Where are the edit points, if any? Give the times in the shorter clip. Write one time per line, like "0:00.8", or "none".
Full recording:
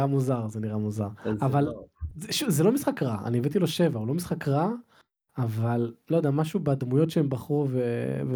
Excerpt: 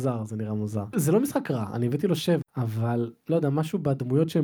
0:00.9
0:02.4